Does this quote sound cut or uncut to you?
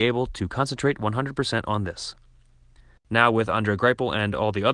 cut